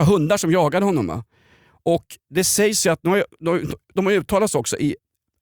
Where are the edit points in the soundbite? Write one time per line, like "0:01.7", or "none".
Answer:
none